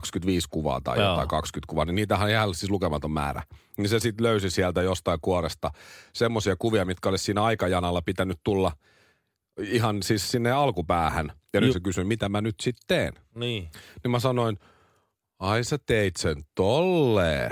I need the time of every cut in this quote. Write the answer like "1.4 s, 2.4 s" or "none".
11.7 s